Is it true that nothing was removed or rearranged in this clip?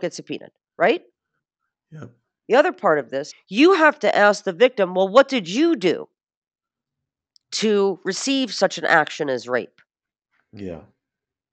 no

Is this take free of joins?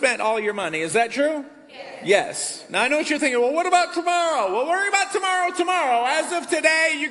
yes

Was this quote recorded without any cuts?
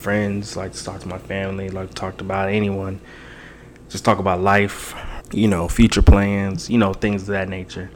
no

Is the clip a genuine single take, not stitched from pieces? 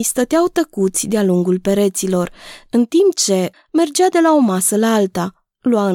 no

